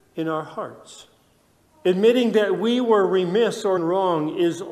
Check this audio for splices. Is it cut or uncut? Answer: cut